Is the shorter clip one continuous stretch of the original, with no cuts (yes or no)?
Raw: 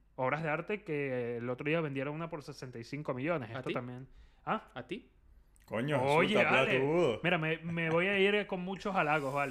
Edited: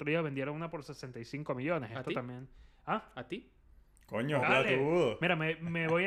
no